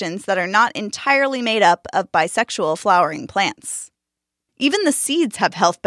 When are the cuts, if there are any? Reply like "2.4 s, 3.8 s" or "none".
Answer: 4.5 s